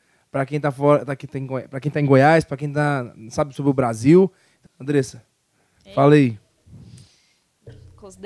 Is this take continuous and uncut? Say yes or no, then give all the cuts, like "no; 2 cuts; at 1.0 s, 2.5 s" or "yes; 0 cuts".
no; 1 cut; at 4.7 s